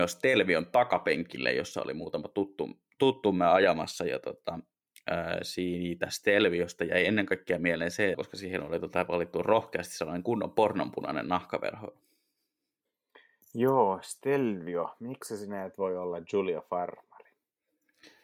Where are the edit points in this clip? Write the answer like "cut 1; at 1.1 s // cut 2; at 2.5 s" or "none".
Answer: cut 1; at 8.1 s

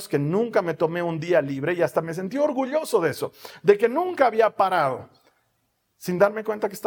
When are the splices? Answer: none

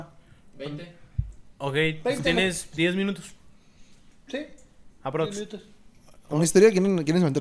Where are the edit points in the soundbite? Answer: none

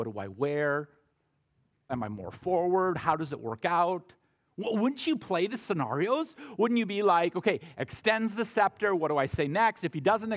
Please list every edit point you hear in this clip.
cut 1; at 1.9 s

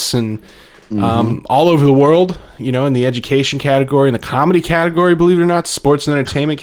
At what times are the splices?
none

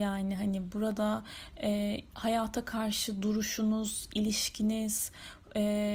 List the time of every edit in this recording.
none

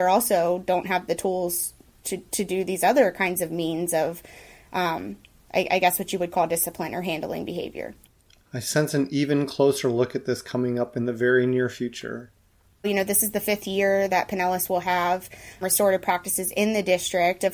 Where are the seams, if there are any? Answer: cut 1; at 12.8 s // cut 2; at 15.6 s

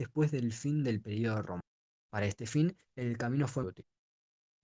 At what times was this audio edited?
cut 1; at 2.1 s // cut 2; at 3.6 s

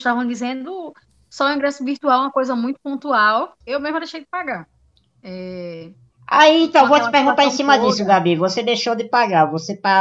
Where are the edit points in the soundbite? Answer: cut 1; at 3.6 s

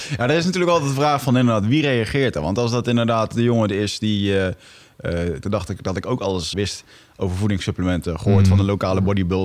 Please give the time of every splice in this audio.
cut 1; at 5.4 s // cut 2; at 6.5 s

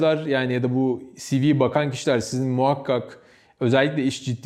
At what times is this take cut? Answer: none

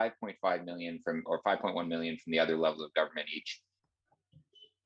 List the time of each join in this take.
cut 1; at 1.3 s

